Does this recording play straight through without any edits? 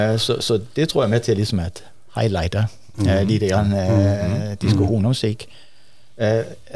yes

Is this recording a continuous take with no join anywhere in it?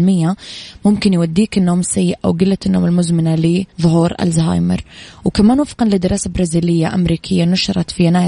no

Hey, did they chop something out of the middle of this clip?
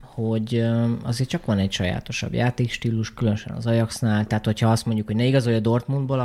no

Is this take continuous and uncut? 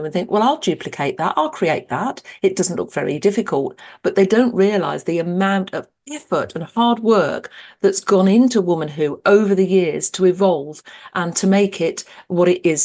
yes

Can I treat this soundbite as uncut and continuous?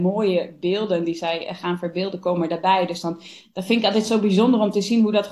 yes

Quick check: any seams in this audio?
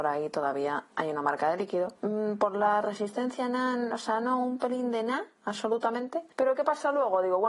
no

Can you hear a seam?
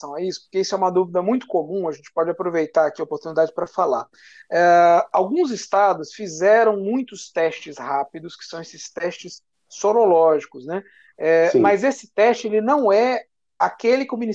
no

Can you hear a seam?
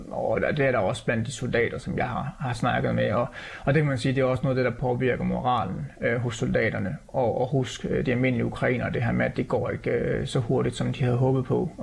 no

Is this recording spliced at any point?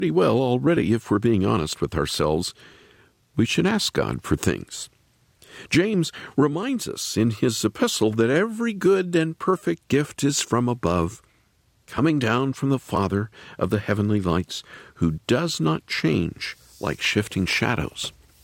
no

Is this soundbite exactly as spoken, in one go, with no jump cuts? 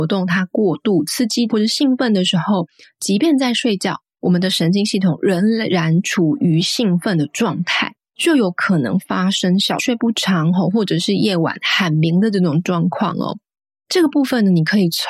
no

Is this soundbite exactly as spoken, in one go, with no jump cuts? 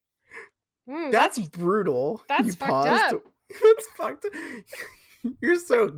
yes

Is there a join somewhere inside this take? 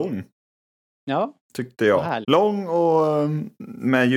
yes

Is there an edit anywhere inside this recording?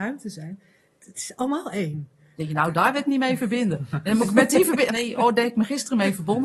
yes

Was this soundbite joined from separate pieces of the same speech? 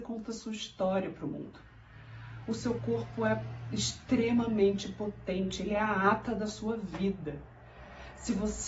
no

